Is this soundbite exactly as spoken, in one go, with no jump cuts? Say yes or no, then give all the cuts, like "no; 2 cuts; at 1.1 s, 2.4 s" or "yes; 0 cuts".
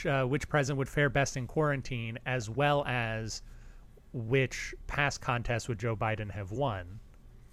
yes; 0 cuts